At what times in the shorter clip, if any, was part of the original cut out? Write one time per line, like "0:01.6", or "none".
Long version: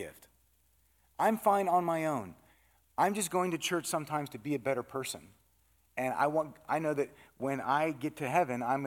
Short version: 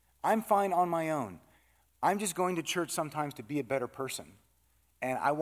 none